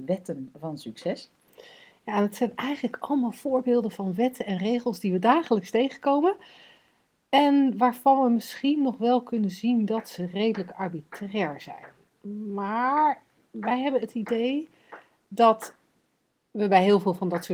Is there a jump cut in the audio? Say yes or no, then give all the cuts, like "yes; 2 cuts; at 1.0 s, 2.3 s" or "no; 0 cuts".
no; 0 cuts